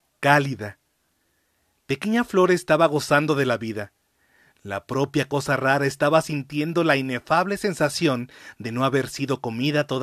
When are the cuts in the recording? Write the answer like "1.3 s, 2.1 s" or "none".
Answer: none